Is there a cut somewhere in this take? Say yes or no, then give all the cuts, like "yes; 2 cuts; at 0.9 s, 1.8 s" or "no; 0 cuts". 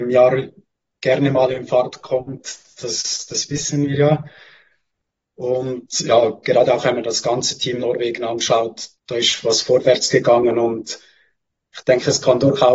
yes; 1 cut; at 8.9 s